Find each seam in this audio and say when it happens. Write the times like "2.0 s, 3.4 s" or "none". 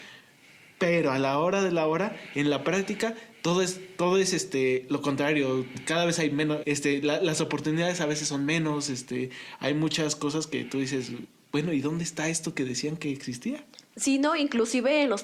6.6 s